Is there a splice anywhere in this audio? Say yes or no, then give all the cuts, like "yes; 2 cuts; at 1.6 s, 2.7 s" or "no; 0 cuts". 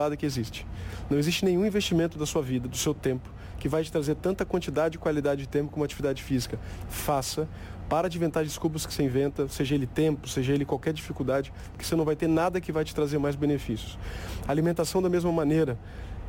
yes; 1 cut; at 11.7 s